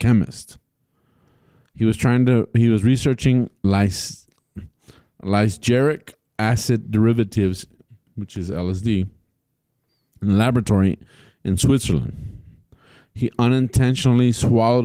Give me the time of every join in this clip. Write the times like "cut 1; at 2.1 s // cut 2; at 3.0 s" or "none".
none